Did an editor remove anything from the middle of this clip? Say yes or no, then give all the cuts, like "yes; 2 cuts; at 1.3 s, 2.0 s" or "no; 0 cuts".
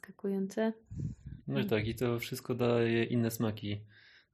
no; 0 cuts